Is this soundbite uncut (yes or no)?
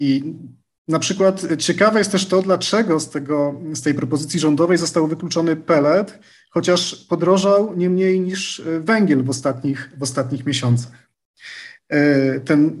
yes